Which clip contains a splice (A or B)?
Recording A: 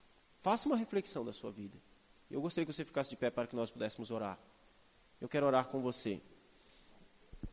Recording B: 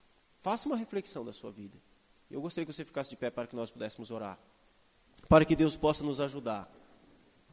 B